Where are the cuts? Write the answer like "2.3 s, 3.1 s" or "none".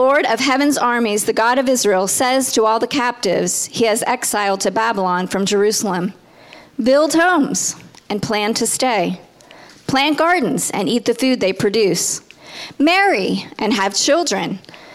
none